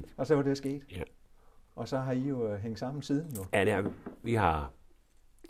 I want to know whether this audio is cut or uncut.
uncut